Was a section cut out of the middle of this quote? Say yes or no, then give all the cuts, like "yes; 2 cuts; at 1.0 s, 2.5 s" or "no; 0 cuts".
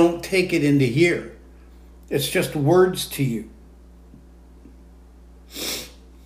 no; 0 cuts